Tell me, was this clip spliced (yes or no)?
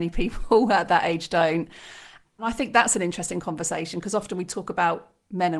yes